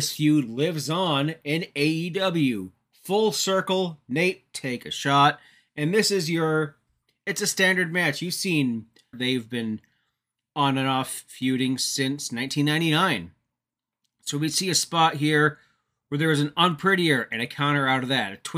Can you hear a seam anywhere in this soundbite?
yes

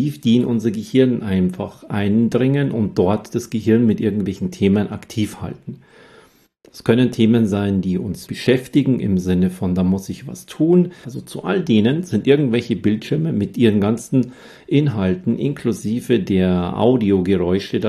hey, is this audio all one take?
no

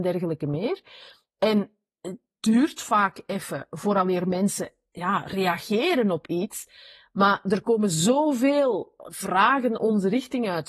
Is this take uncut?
yes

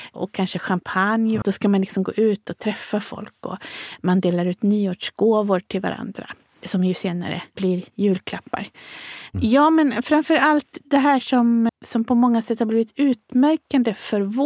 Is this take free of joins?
no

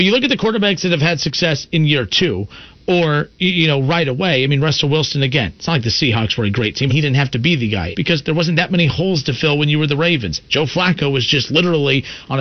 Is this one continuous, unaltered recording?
no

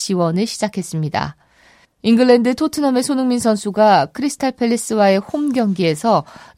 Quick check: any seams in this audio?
yes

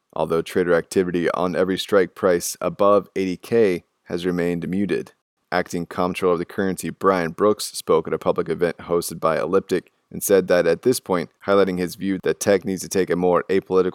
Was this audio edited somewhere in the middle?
yes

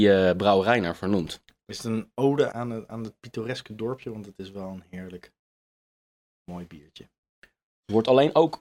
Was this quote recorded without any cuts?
no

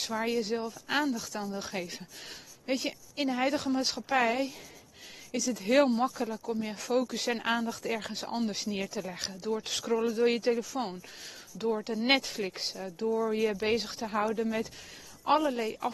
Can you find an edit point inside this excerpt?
no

